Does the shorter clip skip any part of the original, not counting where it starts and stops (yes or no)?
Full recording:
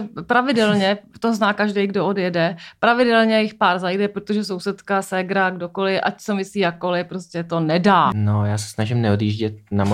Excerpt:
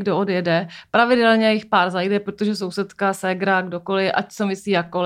no